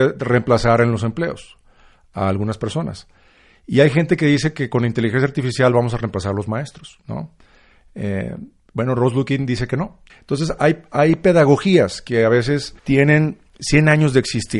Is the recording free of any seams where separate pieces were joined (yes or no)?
no